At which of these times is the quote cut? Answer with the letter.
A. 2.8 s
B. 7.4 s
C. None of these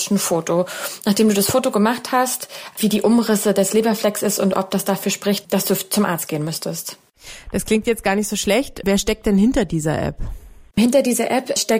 A